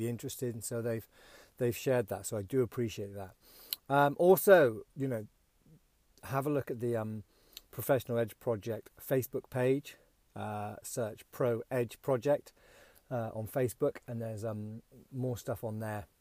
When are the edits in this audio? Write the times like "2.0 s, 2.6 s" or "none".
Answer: 4.9 s